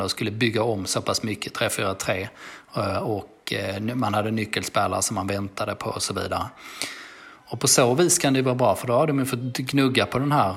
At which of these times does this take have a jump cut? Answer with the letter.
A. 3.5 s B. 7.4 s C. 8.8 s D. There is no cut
D